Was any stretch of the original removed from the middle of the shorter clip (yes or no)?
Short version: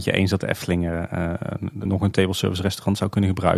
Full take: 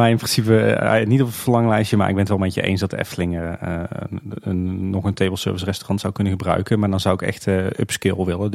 yes